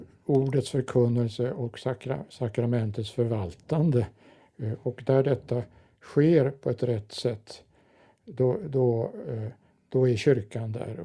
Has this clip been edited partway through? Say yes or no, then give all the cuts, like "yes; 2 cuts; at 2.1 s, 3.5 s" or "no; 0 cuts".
no; 0 cuts